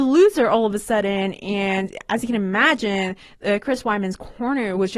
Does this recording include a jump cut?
no; 0 cuts

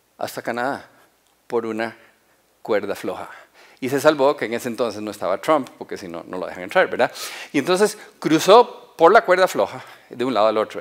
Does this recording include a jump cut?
no; 0 cuts

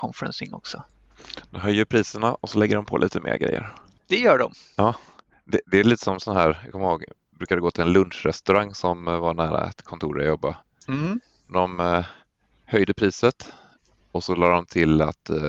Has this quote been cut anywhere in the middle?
no; 0 cuts

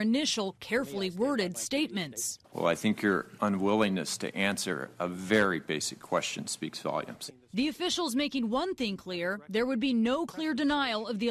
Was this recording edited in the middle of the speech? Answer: yes; 1 cut; at 2.4 s

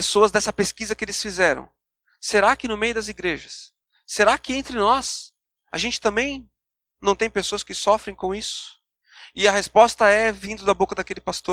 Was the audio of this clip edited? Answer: no; 0 cuts

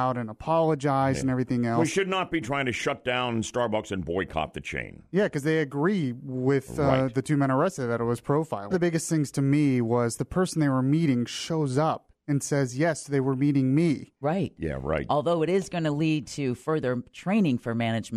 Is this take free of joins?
no; 2 cuts; at 8.7 s, 14.6 s

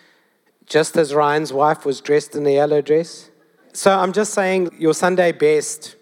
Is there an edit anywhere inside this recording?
yes; 2 cuts; at 3.6 s, 4.7 s

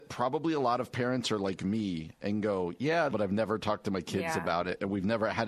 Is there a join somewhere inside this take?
yes; 1 cut; at 3.1 s

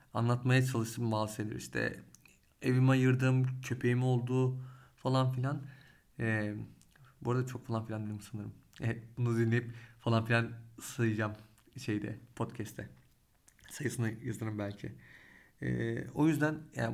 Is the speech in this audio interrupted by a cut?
no; 0 cuts

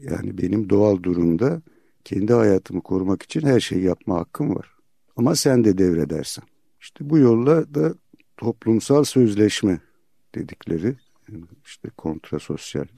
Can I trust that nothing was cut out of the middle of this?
no; 1 cut; at 5.1 s

